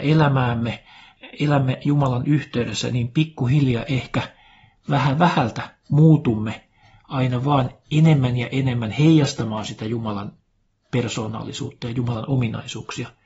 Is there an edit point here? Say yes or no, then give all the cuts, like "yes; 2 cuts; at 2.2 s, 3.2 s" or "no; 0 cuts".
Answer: no; 0 cuts